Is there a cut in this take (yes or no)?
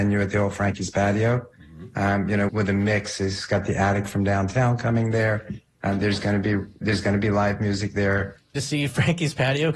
yes